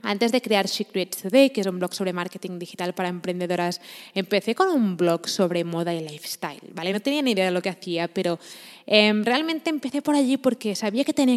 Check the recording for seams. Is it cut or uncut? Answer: uncut